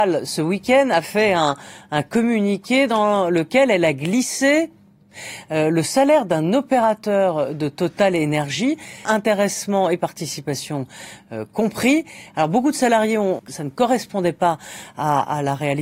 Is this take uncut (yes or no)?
no